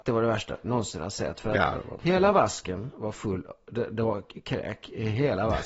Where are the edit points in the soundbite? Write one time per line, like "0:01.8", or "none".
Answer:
none